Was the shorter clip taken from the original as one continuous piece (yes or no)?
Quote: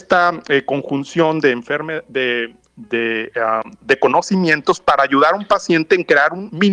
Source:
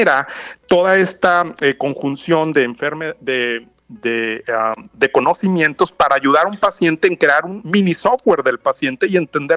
yes